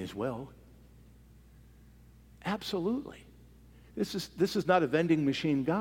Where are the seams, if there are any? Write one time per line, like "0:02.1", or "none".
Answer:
none